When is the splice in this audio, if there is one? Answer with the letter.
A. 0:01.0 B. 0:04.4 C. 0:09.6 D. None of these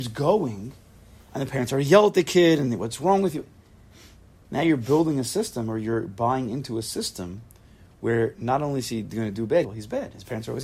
C